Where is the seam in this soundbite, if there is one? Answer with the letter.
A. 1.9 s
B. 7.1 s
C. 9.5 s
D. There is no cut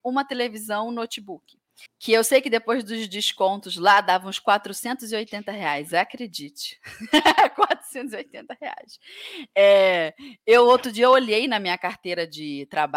A